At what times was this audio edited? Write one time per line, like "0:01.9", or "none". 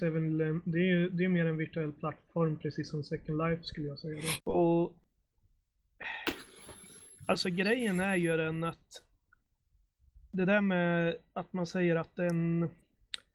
0:04.4